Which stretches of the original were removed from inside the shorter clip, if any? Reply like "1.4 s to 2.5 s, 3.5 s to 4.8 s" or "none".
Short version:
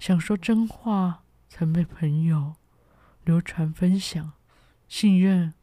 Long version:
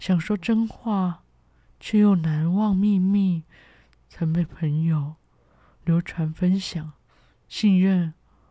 1.4 s to 4.0 s

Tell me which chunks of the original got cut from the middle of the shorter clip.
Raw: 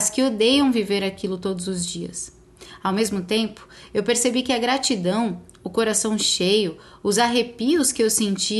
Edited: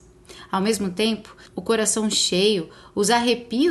3.8 s to 5.5 s

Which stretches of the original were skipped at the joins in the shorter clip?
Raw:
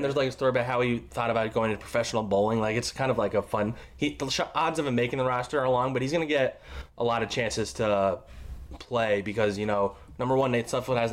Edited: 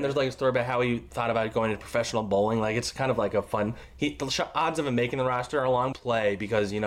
5.9 s to 8.8 s

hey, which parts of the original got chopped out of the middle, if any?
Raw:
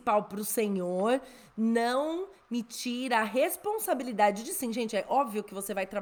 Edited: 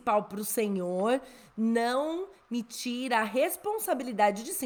none

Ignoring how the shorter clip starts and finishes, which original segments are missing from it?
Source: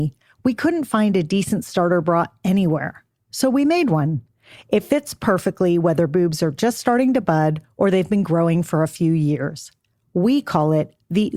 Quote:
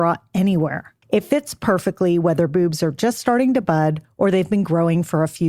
3.1 s to 4.6 s

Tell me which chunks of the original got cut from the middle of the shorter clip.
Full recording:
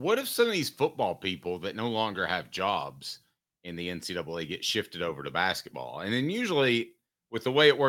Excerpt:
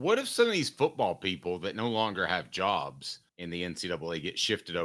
3.3 s to 3.5 s

